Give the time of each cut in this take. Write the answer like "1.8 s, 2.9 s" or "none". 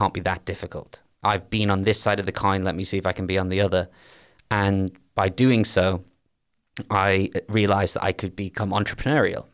none

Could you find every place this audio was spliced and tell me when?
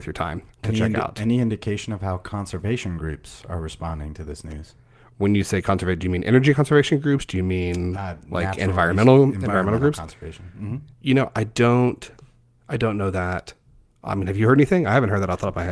7.9 s, 10.9 s

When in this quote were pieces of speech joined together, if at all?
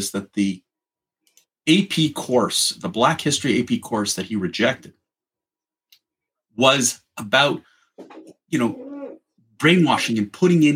none

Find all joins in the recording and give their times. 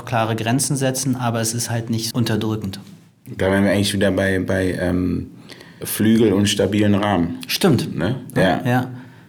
2.1 s, 5.8 s, 8.3 s

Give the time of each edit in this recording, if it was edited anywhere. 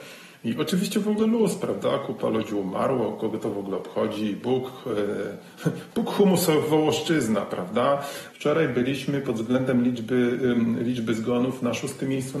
5.5 s, 8.3 s

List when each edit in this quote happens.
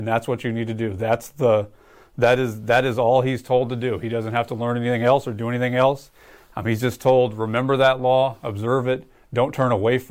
none

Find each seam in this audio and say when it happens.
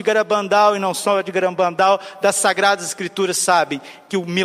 none

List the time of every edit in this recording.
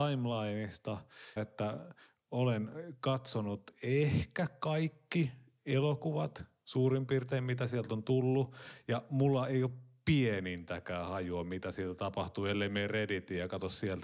1.4 s

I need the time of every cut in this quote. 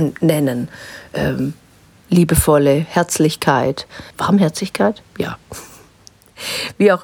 4.1 s

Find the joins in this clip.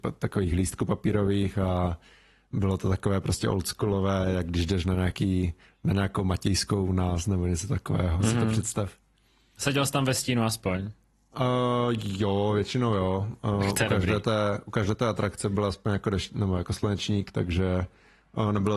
none

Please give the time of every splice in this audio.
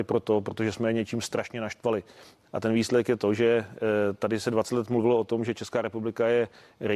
2.4 s

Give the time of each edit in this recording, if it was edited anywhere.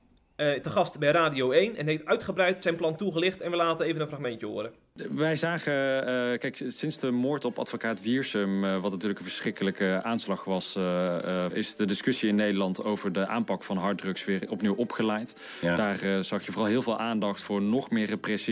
11.5 s

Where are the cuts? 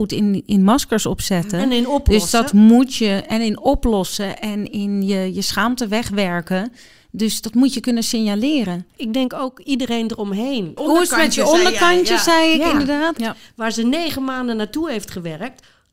10.8 s, 13.2 s

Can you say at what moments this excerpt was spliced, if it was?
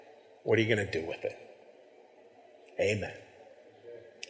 none

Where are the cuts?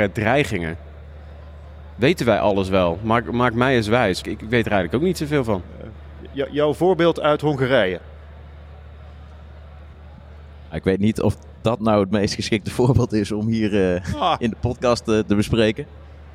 4.2 s

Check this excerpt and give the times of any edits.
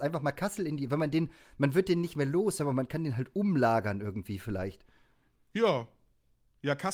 none

